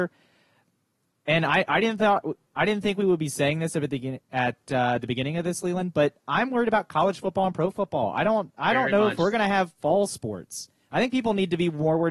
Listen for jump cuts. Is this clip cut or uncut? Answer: uncut